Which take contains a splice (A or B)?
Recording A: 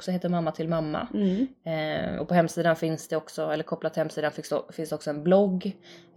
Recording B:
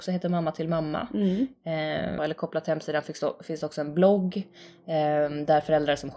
B